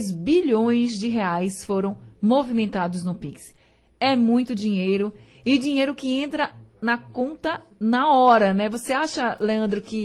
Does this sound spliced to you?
no; 0 cuts

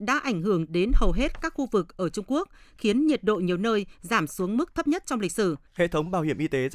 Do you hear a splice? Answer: yes; 1 cut; at 5.7 s

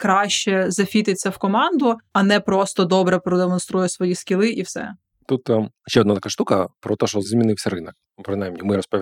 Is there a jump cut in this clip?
yes; 1 cut; at 2.1 s

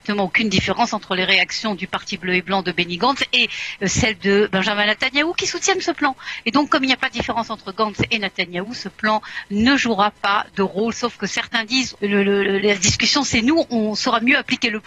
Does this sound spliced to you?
yes; 1 cut; at 12.0 s

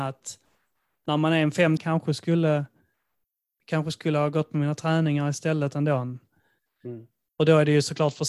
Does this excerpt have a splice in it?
yes; 1 cut; at 1.8 s

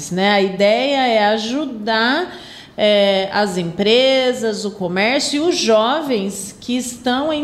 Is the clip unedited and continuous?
yes; 0 cuts

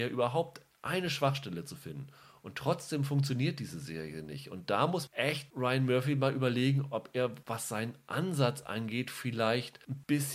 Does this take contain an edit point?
no; 0 cuts

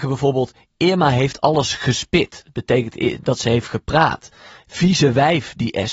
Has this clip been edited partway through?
no; 0 cuts

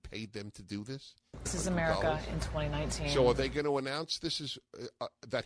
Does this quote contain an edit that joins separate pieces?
yes; 1 cut; at 1.5 s

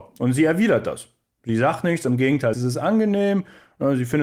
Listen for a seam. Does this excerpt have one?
yes; 1 cut; at 2.5 s

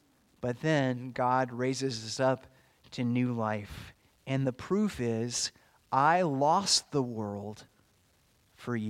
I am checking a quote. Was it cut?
yes; 1 cut; at 4.1 s

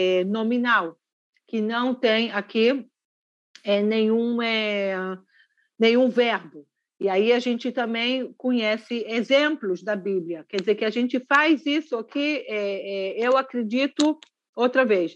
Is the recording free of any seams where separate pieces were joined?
yes; 0 cuts

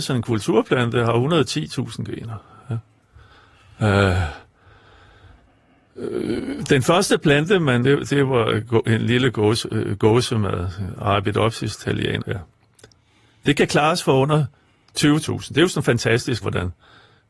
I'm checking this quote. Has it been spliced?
yes; 3 cuts; at 7.8 s, 12.2 s, 16.4 s

